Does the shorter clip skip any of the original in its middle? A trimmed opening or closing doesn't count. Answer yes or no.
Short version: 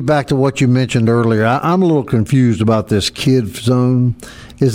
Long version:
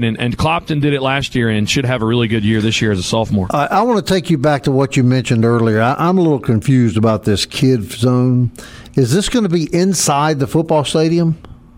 no